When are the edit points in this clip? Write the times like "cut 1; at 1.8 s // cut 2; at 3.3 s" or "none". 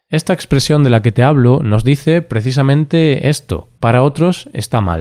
cut 1; at 3.8 s